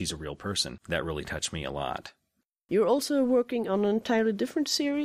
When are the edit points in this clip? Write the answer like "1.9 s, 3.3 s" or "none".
none